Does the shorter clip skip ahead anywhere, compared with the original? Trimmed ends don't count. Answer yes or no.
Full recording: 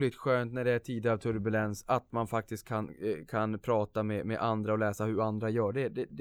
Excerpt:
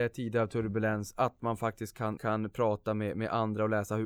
yes